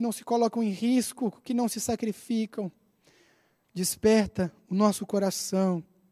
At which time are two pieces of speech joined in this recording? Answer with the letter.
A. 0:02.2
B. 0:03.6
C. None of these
B